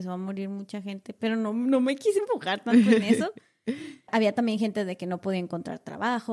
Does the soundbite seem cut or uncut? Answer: cut